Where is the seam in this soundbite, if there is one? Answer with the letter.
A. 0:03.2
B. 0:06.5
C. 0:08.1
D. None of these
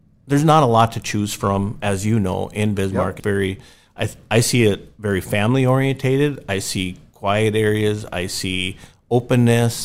A